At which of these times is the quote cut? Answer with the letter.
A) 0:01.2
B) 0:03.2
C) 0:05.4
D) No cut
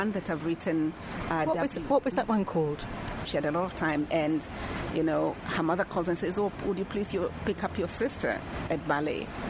B